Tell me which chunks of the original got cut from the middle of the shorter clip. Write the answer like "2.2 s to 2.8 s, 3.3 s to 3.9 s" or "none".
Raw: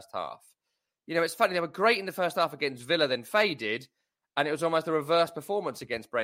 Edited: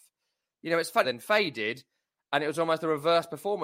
1.5 s to 3.1 s